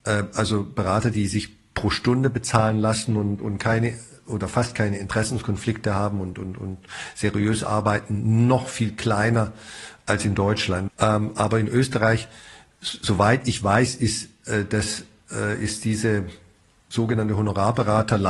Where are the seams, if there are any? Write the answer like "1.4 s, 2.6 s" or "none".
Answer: 10.9 s